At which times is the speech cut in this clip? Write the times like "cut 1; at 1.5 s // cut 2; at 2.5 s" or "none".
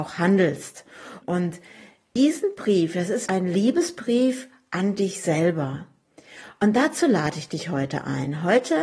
cut 1; at 1.2 s // cut 2; at 3.3 s